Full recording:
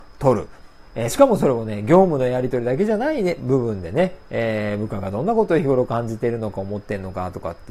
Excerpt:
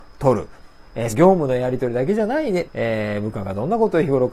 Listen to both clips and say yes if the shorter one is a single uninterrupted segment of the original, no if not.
no